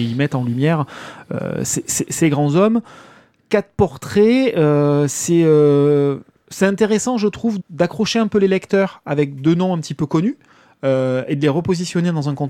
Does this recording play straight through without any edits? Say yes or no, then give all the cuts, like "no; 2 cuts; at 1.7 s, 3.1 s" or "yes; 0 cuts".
no; 1 cut; at 7.6 s